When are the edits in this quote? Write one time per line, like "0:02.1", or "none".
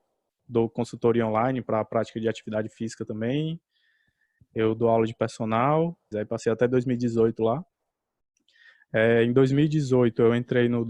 0:06.1